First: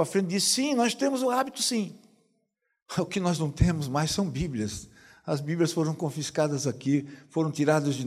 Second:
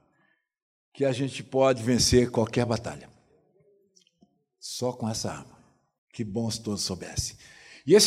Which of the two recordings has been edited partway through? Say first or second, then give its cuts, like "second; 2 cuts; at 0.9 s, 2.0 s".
second; 1 cut; at 6.0 s